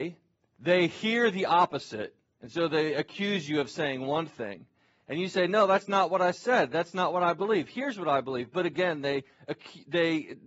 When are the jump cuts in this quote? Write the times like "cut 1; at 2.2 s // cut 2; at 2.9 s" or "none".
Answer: none

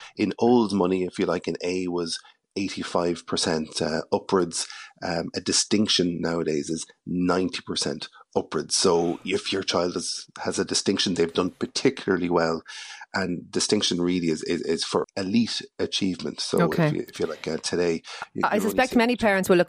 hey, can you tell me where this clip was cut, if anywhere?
cut 1; at 15.0 s

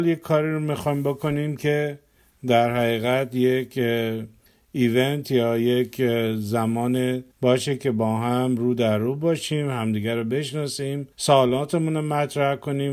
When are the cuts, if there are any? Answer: cut 1; at 7.3 s // cut 2; at 11.1 s

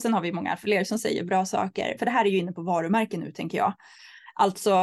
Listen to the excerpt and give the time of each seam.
cut 1; at 2.0 s

